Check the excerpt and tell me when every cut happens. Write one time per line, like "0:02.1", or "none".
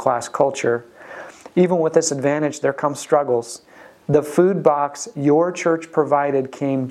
0:04.0